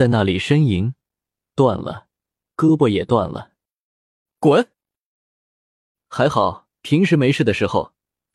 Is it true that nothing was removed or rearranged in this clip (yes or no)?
no